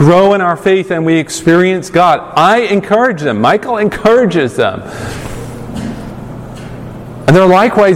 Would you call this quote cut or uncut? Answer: uncut